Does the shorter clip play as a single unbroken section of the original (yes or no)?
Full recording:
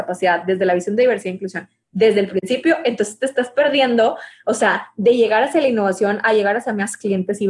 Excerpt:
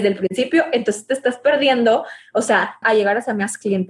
no